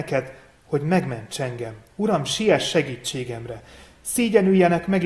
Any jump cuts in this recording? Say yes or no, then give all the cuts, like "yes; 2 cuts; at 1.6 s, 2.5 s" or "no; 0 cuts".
no; 0 cuts